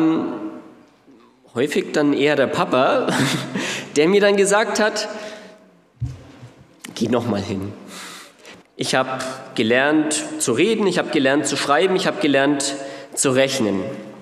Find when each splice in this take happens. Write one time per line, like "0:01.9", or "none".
0:08.6